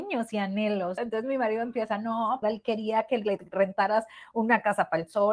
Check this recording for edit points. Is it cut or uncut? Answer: cut